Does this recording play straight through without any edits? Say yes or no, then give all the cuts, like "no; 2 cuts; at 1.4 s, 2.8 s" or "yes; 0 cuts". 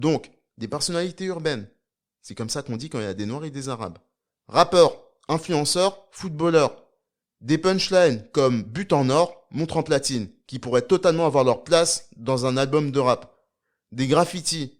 yes; 0 cuts